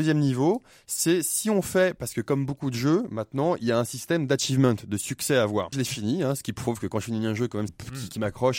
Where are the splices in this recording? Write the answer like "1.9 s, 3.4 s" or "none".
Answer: 5.7 s, 7.7 s